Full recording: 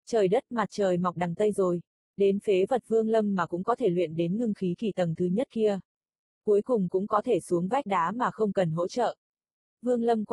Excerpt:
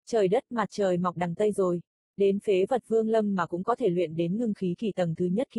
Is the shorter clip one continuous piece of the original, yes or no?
yes